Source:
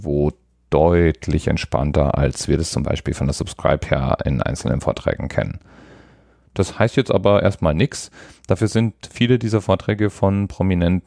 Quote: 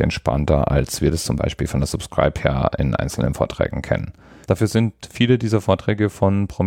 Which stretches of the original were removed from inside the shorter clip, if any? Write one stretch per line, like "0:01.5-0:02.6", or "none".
0:05.9-0:08.4